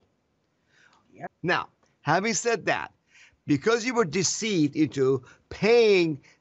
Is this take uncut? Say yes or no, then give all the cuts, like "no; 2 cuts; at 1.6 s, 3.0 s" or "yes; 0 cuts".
no; 1 cut; at 1.3 s